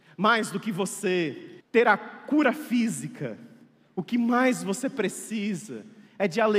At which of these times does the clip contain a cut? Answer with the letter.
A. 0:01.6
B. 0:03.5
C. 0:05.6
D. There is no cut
A